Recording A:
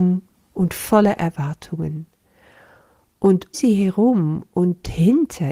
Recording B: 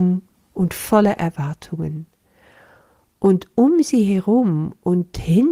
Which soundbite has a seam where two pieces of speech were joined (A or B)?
A